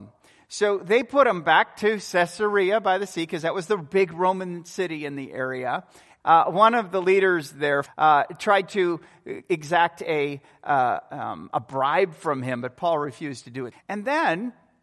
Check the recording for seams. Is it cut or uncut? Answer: cut